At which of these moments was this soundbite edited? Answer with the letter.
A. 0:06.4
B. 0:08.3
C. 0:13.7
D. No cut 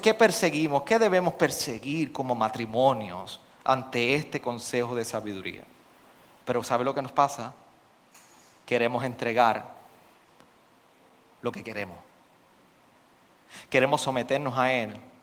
A